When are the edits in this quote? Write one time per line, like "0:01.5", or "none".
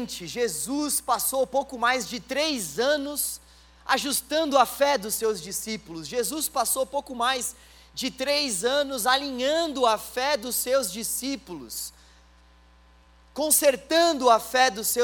none